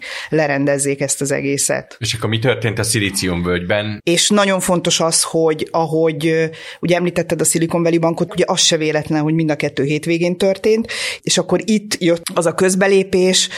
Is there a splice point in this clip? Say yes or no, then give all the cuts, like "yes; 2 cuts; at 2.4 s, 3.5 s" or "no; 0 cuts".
yes; 3 cuts; at 4.0 s, 8.3 s, 11.2 s